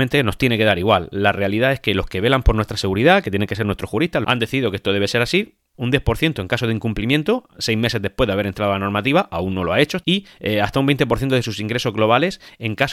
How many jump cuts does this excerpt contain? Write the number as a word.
three